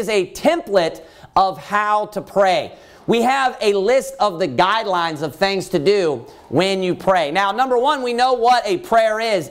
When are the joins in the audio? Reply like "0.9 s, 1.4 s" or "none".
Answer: none